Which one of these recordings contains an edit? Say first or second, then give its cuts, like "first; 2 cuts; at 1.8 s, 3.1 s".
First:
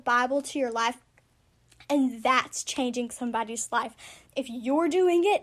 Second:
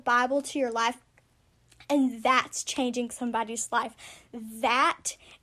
first; 1 cut; at 4.3 s